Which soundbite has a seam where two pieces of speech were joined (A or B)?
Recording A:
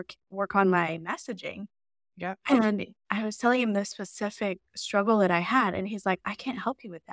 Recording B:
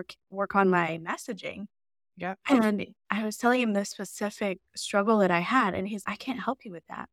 B